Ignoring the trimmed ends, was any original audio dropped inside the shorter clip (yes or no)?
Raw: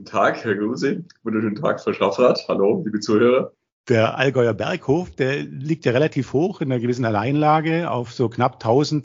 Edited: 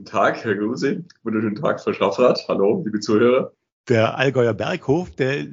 no